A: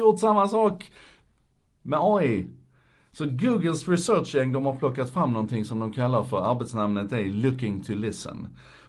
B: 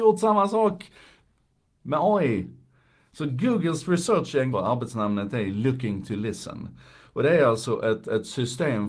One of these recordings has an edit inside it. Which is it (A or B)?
B